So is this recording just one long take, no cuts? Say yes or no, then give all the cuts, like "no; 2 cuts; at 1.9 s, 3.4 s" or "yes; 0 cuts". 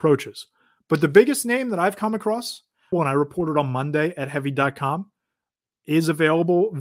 no; 1 cut; at 2.9 s